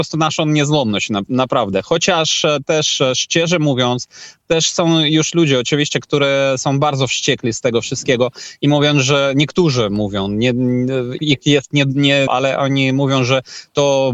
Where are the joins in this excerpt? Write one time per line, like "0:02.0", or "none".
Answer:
0:11.2
0:12.3